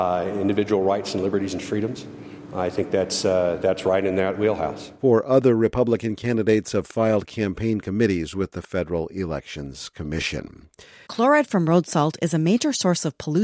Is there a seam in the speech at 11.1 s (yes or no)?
yes